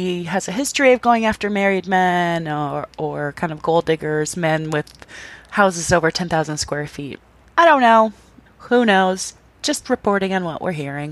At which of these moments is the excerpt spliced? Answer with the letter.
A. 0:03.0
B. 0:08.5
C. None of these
B